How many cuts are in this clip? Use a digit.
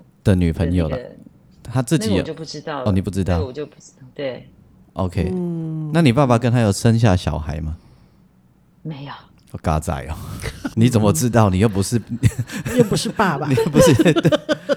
1